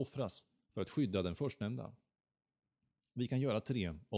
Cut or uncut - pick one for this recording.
uncut